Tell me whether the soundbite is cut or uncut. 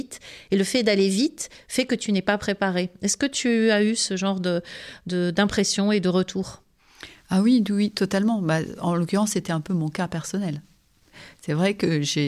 uncut